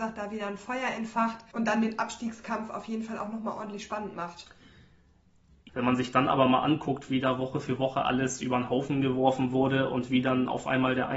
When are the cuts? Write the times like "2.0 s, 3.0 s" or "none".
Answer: 5.7 s